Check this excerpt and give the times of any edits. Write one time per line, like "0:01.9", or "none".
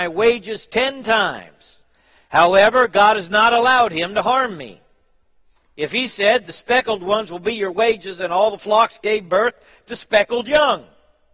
none